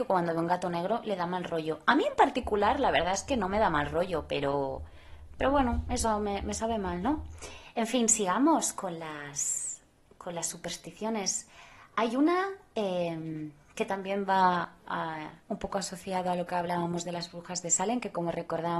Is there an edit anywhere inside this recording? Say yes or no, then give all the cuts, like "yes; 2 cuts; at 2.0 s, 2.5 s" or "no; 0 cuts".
no; 0 cuts